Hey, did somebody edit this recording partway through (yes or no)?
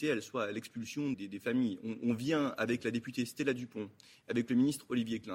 yes